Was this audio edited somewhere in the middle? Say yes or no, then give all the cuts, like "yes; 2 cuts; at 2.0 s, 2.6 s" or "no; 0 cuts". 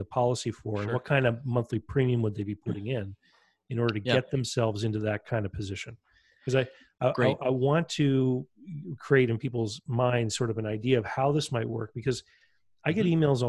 no; 0 cuts